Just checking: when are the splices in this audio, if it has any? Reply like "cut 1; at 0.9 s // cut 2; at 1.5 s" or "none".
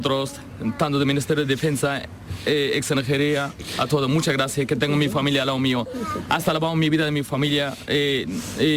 none